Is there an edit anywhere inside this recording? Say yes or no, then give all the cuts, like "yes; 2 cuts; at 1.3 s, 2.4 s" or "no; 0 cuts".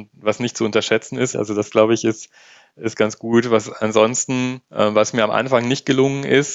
yes; 2 cuts; at 1.3 s, 4.6 s